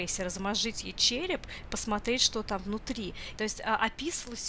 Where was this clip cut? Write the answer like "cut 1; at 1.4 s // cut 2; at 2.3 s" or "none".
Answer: cut 1; at 3.4 s